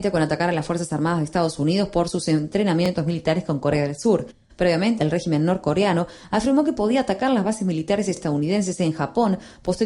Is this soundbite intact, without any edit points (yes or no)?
no